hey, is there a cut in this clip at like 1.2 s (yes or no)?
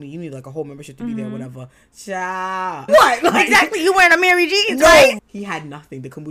no